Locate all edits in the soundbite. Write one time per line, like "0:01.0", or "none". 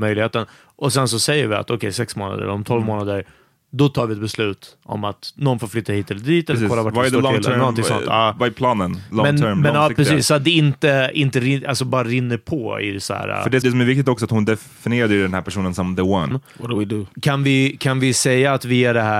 0:13.6
0:16.3